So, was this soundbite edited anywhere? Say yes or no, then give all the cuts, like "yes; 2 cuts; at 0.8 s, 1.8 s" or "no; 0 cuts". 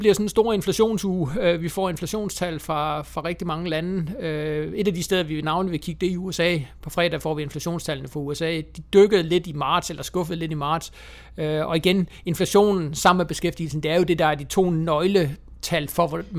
no; 0 cuts